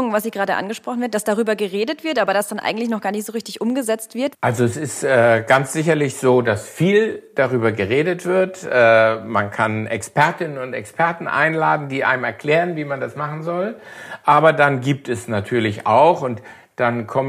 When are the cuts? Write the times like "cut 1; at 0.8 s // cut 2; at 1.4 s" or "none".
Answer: cut 1; at 4.3 s